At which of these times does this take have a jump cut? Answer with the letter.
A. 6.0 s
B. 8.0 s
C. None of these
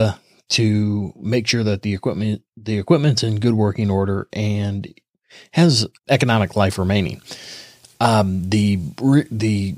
A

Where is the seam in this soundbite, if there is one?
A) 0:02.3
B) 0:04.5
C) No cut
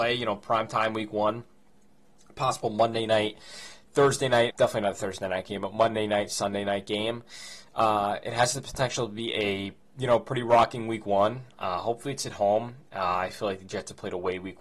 B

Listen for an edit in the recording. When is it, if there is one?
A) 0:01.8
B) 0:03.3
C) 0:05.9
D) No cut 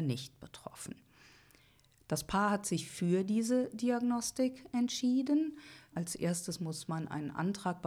C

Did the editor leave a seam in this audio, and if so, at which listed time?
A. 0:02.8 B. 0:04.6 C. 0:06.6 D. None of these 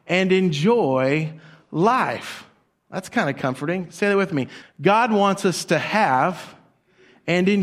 B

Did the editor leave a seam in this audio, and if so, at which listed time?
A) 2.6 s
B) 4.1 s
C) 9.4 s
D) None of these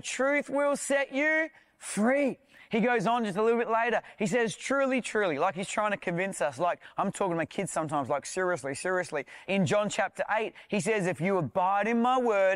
C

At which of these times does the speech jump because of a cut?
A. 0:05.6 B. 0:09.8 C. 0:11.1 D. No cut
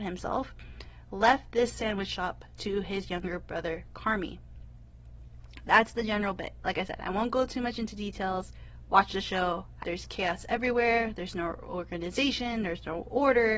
B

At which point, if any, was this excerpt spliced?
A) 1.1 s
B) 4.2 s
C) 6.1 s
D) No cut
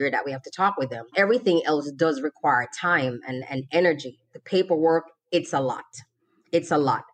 D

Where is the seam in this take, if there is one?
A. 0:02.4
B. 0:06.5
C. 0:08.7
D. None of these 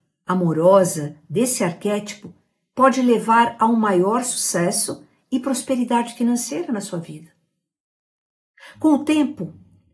C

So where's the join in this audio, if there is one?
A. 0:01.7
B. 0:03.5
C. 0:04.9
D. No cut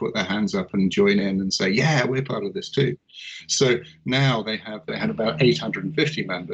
C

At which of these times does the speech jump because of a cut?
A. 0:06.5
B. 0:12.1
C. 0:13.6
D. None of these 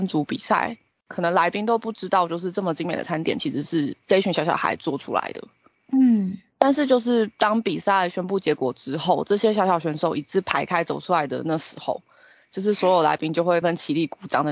C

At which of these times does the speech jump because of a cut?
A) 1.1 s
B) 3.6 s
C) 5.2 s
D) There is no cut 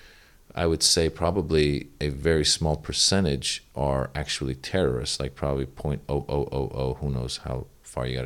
D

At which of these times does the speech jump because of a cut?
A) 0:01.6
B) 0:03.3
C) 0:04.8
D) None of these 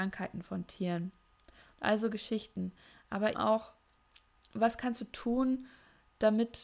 B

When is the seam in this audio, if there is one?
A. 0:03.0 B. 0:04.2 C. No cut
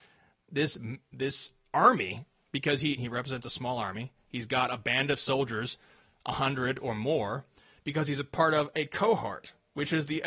A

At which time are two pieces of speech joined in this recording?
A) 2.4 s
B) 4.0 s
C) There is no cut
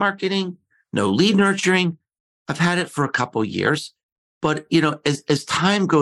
A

